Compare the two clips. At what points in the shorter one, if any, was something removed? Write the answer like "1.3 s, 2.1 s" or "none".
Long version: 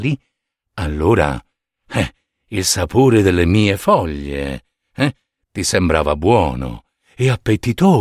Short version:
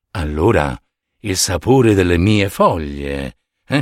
1.0 s